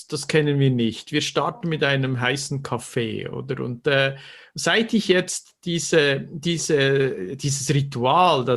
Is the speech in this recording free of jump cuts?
yes; 0 cuts

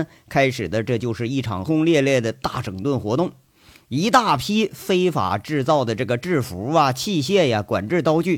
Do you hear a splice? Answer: yes; 1 cut; at 1.7 s

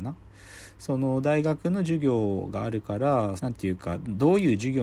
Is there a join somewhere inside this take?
yes; 1 cut; at 3.4 s

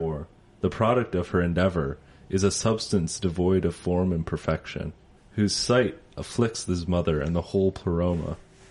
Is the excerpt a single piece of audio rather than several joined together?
no; 1 cut; at 5.2 s

